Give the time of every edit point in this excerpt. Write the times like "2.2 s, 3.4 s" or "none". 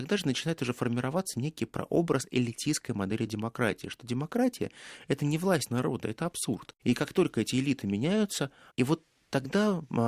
6.8 s, 8.7 s